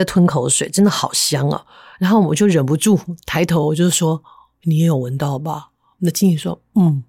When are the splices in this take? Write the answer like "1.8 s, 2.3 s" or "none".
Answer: none